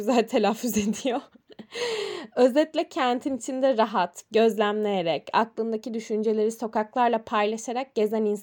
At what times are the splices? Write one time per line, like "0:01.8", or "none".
0:04.3